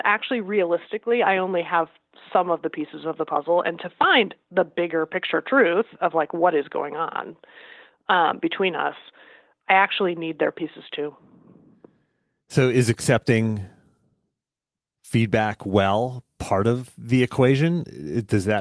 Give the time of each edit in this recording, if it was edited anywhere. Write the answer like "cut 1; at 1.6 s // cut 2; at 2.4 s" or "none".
none